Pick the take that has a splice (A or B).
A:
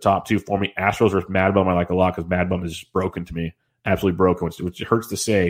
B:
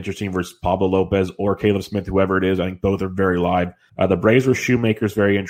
B